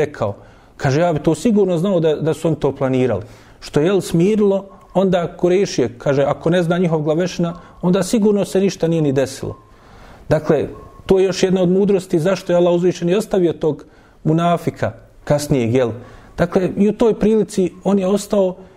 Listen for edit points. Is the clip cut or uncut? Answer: uncut